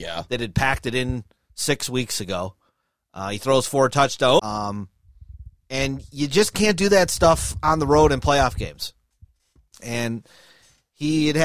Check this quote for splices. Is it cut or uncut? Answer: cut